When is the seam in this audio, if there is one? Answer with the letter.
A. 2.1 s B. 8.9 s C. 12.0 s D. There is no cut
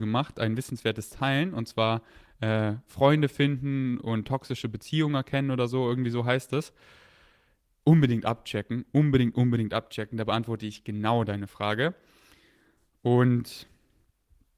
D